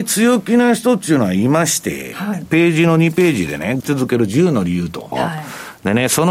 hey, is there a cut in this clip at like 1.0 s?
no; 3 cuts; at 2.5 s, 3.8 s, 5.1 s

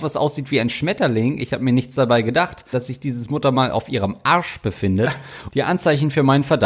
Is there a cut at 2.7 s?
yes; 2 cuts; at 2.7 s, 5.5 s

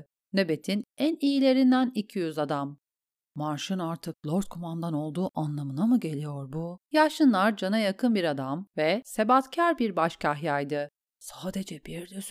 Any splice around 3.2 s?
no; 2 cuts; at 6.9 s, 11.0 s

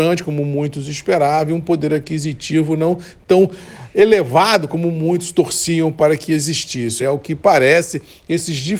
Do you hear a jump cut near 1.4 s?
no; 1 cut; at 7.0 s

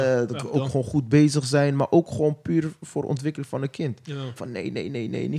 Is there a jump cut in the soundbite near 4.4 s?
yes; 1 cut; at 4.4 s

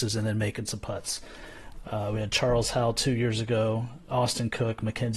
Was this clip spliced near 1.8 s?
yes; 1 cut; at 1.8 s

